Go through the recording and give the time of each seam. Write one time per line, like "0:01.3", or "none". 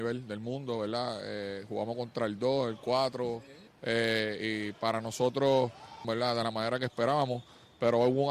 0:03.7
0:06.0

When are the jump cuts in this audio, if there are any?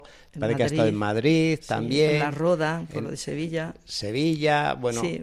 none

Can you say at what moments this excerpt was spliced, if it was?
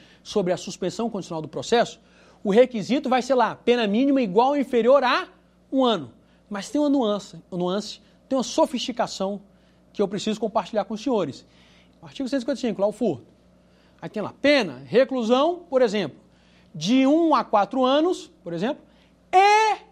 0:12.0

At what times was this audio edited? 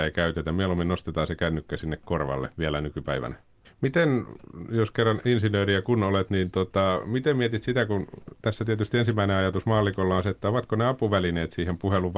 0:03.6

